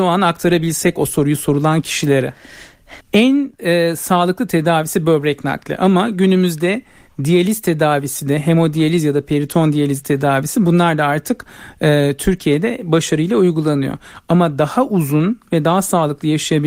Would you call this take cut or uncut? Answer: cut